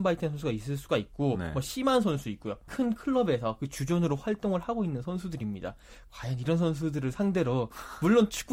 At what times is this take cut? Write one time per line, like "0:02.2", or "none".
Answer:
0:02.7